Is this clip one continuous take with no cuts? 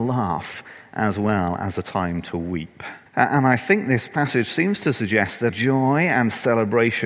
no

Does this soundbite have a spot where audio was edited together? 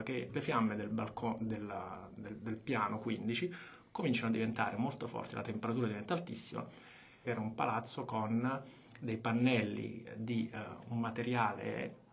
yes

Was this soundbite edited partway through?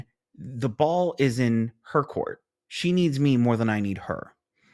no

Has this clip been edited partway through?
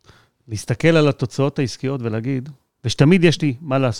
yes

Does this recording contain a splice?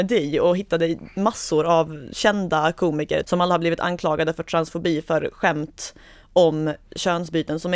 yes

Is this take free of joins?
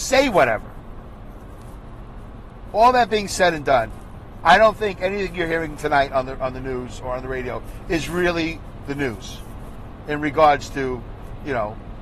yes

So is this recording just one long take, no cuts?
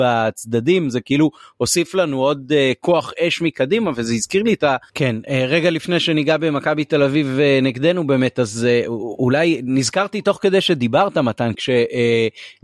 no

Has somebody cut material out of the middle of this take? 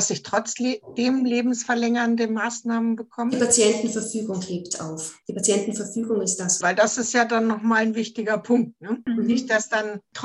yes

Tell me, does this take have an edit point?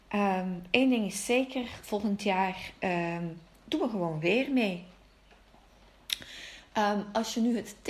no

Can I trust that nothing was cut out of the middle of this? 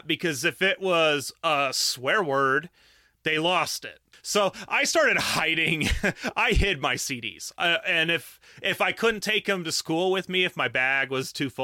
yes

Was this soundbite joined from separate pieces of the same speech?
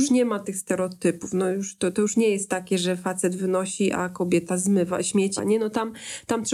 yes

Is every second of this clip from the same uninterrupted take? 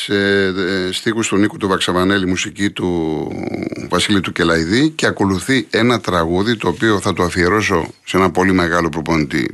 yes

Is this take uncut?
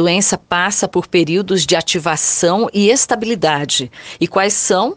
yes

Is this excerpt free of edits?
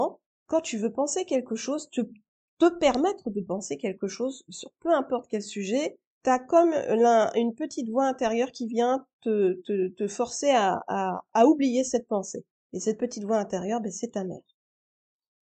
yes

